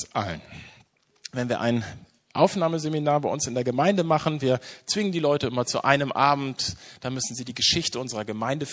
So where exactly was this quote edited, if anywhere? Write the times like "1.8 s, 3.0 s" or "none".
none